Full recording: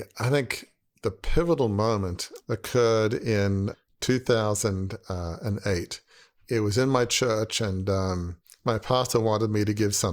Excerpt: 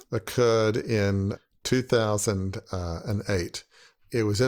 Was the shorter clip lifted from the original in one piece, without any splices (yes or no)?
yes